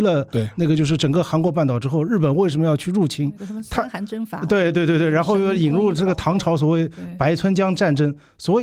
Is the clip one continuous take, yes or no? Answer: yes